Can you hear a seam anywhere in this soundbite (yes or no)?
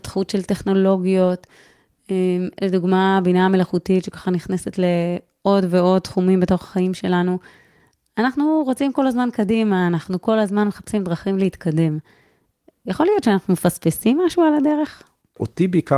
no